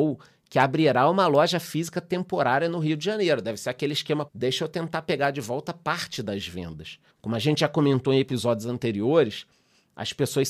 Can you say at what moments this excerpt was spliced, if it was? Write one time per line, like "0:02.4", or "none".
0:04.3
0:07.1